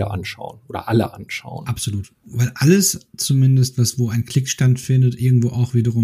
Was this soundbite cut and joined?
no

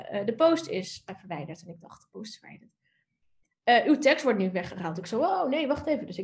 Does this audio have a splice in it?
no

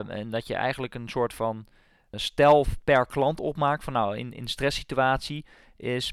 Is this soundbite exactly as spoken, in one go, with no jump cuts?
no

